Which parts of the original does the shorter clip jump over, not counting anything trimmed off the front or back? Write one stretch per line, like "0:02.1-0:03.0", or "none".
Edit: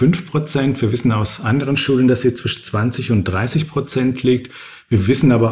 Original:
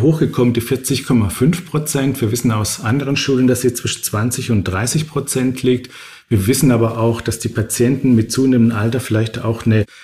none